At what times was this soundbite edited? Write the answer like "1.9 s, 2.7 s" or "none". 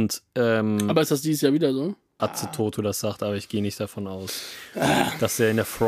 2.2 s